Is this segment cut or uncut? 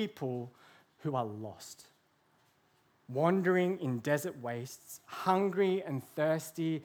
uncut